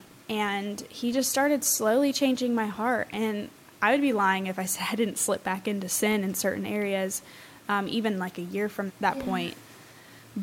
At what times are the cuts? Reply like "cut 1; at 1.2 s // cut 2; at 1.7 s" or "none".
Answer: cut 1; at 8.9 s